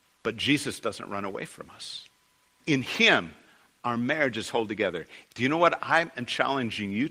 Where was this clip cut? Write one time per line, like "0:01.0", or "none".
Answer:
0:02.6
0:05.3